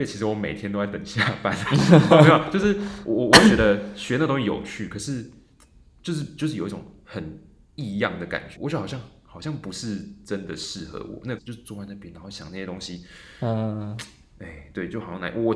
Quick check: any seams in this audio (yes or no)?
yes